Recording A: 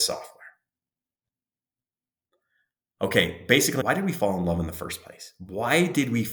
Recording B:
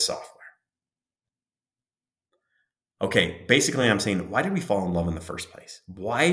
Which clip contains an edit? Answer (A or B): A